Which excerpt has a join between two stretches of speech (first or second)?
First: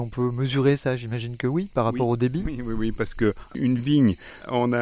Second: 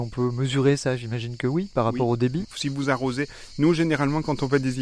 second